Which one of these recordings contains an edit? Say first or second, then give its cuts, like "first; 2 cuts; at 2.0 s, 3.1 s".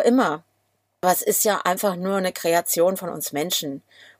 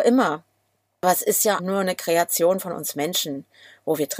second; 1 cut; at 1.6 s